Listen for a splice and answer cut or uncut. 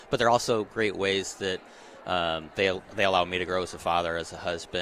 uncut